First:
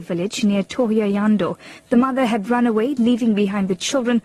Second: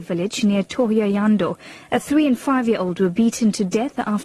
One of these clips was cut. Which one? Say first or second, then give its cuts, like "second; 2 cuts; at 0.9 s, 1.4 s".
first; 1 cut; at 1.8 s